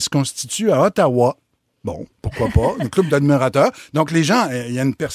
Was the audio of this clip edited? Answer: no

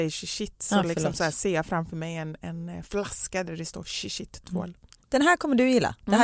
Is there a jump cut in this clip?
no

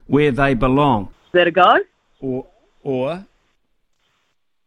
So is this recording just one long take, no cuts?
no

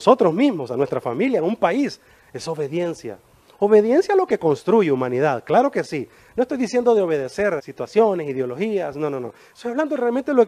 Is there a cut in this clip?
yes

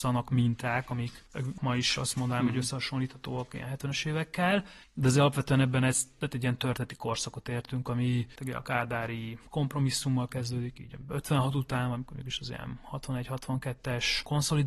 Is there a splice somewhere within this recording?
no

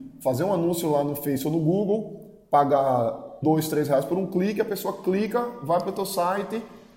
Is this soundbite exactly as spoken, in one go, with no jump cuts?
no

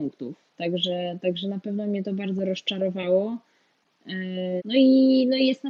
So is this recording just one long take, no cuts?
no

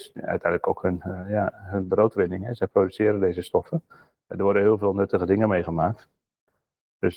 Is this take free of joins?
yes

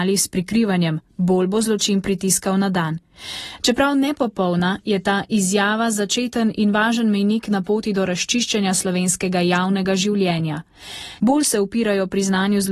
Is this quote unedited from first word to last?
no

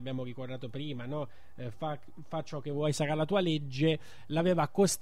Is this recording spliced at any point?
no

